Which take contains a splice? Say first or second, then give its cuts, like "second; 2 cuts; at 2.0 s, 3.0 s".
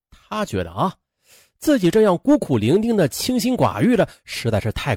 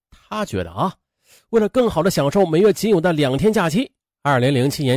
second; 1 cut; at 1.4 s